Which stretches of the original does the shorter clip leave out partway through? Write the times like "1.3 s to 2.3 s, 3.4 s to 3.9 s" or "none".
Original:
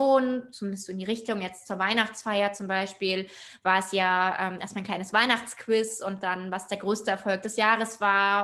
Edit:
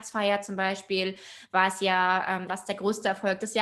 4.6 s to 6.5 s